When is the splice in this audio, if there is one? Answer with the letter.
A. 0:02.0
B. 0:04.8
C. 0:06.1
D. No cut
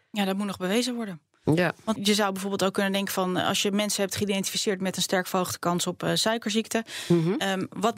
A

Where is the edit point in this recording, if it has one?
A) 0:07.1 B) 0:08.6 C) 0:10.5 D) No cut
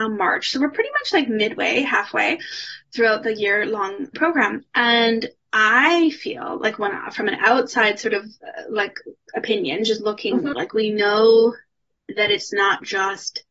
C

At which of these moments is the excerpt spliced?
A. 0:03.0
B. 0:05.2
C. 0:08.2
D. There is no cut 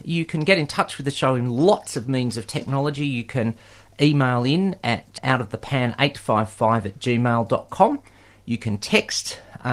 B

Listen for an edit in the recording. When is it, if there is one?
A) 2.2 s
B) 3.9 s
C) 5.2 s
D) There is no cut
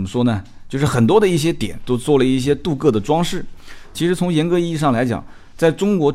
B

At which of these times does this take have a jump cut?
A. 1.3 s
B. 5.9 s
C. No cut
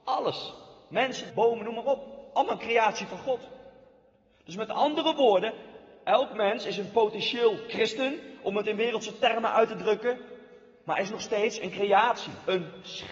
A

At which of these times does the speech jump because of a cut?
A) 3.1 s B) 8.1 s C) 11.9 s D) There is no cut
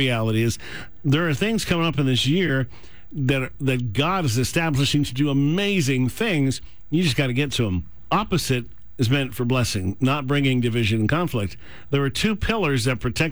D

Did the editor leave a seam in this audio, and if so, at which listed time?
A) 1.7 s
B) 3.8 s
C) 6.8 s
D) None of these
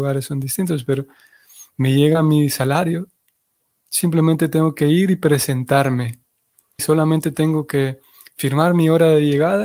C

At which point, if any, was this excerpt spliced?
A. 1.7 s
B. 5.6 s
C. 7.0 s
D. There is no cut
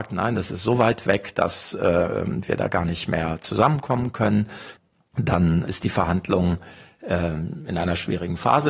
B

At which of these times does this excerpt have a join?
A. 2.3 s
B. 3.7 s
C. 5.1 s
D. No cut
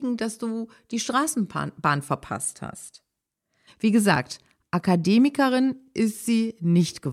B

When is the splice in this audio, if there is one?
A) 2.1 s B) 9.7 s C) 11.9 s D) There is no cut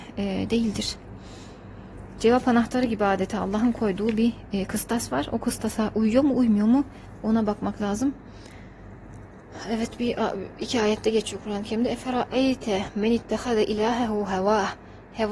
D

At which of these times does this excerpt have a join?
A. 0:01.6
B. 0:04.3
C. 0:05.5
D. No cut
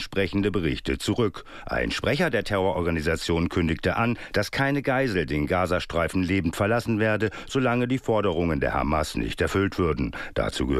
D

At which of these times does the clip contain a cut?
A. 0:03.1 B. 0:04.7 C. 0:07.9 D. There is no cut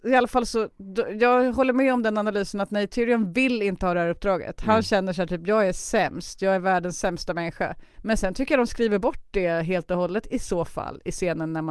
C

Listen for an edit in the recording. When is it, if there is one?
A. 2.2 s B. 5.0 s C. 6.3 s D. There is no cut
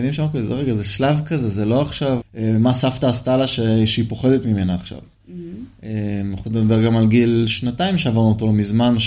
A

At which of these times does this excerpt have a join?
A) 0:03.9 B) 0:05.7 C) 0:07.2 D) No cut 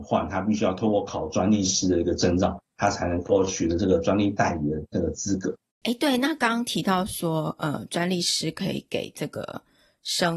B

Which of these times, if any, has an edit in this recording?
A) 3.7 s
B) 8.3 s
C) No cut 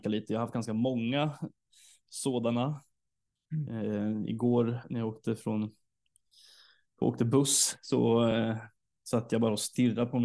C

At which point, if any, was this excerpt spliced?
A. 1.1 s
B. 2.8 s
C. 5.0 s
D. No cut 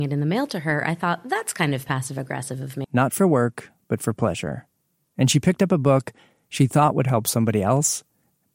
B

